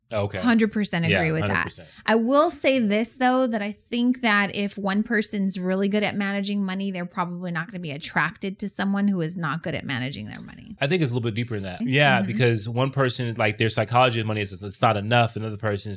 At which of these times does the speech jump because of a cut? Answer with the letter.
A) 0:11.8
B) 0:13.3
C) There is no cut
A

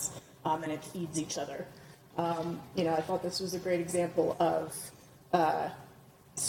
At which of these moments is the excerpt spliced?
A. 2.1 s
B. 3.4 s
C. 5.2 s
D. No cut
A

